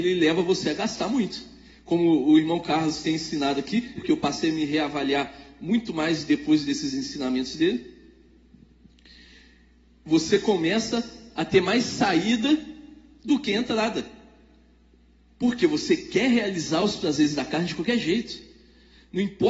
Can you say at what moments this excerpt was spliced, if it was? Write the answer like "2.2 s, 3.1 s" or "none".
4.0 s